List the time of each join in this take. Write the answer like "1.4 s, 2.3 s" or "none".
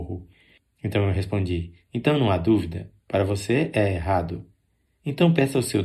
none

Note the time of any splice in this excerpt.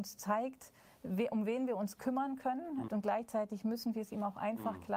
2.9 s

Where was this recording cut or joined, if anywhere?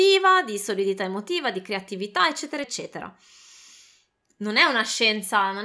2.6 s

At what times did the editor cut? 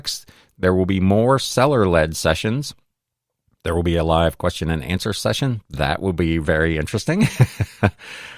none

